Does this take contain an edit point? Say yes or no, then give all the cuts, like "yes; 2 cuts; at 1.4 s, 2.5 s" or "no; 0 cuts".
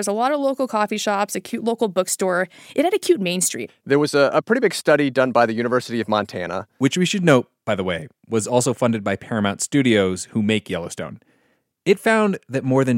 yes; 1 cut; at 3.7 s